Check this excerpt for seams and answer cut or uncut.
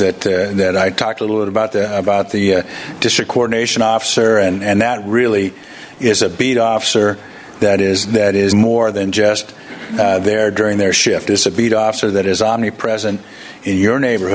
cut